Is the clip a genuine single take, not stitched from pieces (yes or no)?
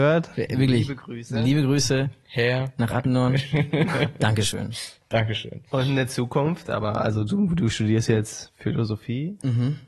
no